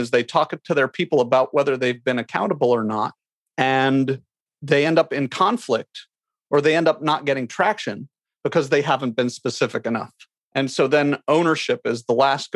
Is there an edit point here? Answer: yes; 1 cut; at 10.4 s

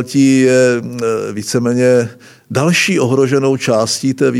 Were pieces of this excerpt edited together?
no; 0 cuts

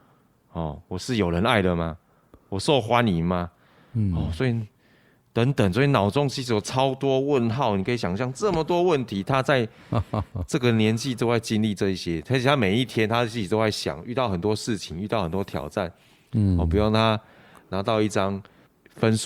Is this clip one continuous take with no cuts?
yes; 0 cuts

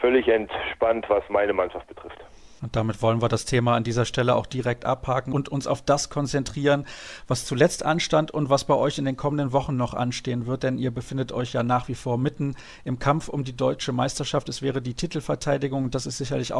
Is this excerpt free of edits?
yes; 0 cuts

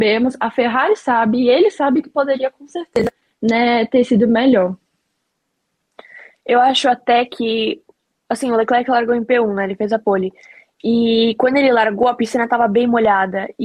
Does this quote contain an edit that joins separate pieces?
no; 0 cuts

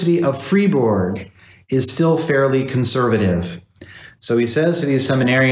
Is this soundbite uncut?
yes; 0 cuts

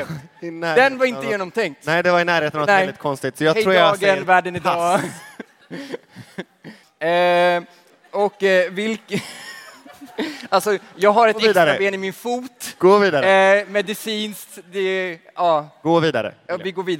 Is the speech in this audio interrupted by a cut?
yes; 1 cut; at 6.8 s

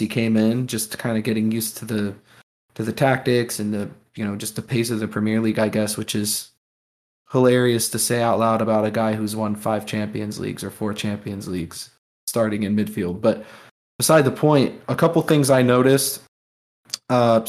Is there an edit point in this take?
yes; 1 cut; at 14.8 s

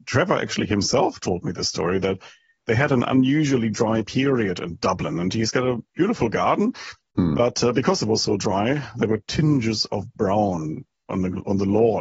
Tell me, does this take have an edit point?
no; 0 cuts

